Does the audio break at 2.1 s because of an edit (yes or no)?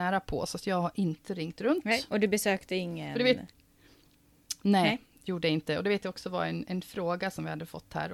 no